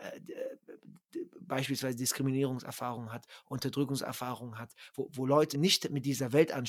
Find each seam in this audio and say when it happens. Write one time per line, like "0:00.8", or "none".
0:05.5